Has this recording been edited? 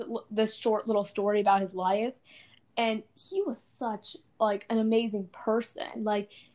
no; 0 cuts

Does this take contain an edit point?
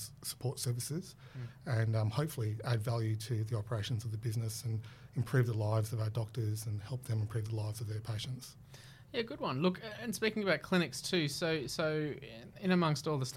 no; 0 cuts

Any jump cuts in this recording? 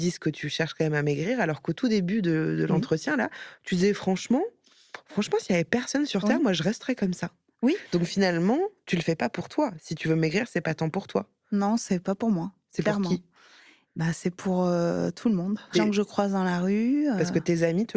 yes; 1 cut; at 15.7 s

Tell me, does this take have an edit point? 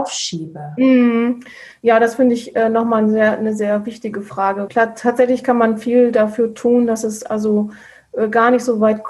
yes; 1 cut; at 4.7 s

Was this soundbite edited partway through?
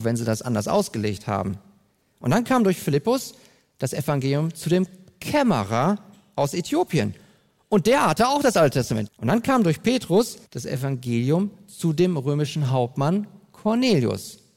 yes; 2 cuts; at 9.1 s, 10.5 s

